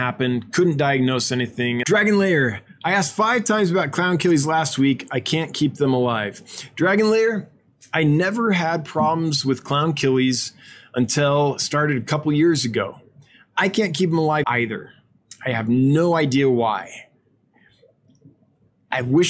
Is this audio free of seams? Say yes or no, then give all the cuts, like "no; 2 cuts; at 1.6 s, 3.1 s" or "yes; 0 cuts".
no; 2 cuts; at 1.8 s, 14.4 s